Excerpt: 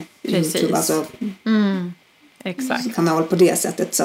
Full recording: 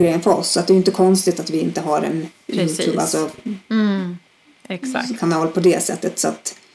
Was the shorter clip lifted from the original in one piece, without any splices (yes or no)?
yes